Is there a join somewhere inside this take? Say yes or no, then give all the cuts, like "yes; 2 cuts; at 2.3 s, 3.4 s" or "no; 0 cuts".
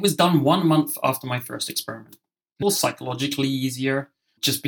yes; 1 cut; at 2.6 s